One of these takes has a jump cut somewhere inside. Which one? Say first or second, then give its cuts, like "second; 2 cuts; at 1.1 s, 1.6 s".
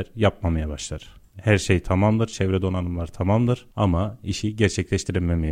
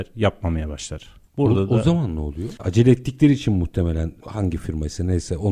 second; 2 cuts; at 1.3 s, 2.6 s